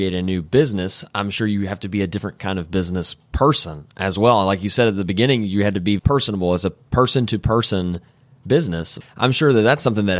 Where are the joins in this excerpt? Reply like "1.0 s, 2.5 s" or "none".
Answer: 6.0 s, 9.0 s